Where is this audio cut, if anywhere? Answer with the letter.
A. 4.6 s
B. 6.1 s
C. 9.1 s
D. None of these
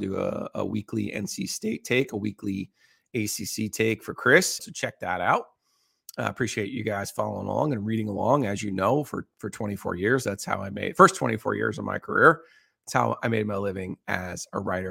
A